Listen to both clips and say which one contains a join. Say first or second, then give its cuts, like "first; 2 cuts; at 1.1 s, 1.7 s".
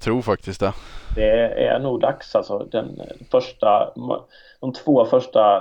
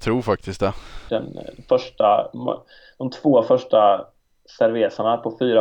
second; 1 cut; at 1.1 s